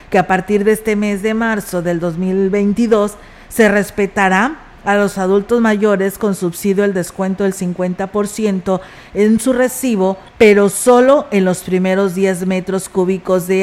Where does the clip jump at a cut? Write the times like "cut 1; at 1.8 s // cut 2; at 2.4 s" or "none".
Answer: cut 1; at 10.3 s